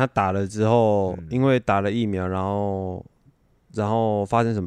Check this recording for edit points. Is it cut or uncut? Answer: uncut